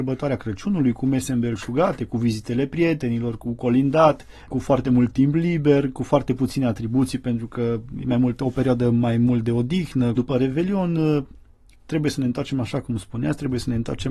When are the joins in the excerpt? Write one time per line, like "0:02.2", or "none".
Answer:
0:10.2